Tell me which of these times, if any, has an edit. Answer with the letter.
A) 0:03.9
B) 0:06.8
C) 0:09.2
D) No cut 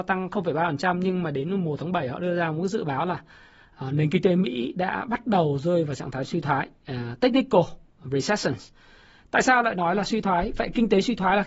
D